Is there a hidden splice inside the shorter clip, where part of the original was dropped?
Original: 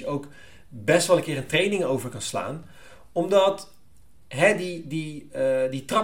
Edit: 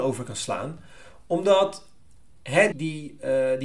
yes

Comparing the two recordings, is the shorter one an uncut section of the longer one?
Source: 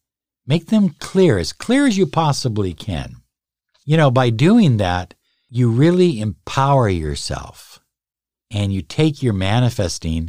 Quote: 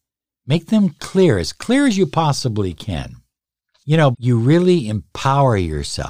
no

